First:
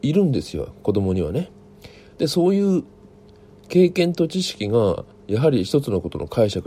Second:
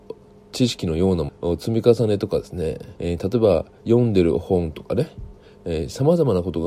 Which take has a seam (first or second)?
second